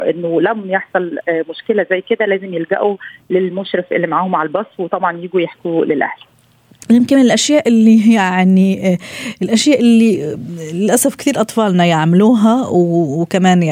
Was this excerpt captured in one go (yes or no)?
yes